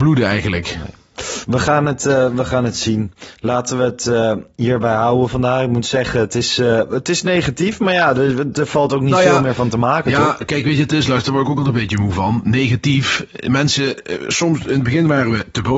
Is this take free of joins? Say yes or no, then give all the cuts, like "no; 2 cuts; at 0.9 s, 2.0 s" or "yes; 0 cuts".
yes; 0 cuts